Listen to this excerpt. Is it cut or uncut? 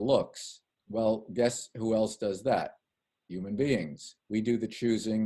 cut